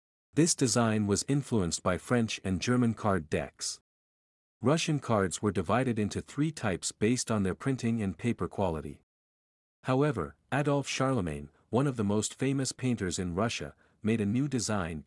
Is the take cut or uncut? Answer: uncut